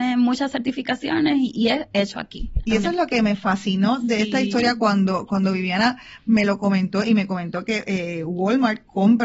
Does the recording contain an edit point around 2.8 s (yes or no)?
no